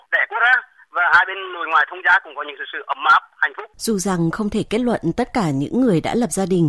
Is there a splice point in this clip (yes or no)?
yes